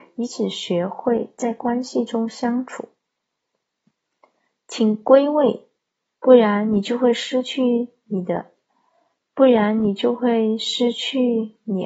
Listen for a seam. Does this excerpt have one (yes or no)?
yes